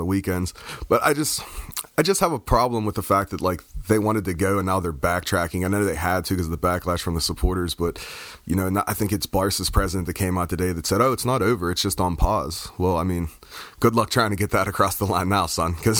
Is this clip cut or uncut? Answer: uncut